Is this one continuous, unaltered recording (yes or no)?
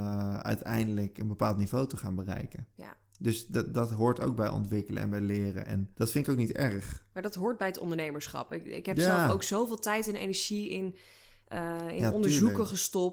no